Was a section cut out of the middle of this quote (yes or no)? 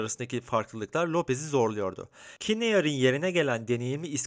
yes